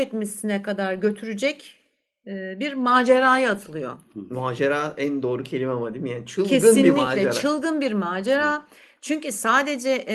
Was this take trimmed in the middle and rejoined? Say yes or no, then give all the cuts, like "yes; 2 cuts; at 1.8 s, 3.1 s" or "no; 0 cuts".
no; 0 cuts